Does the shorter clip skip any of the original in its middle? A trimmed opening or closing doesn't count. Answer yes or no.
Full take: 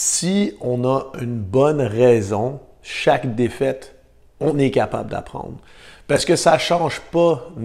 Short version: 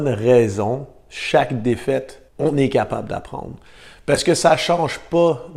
yes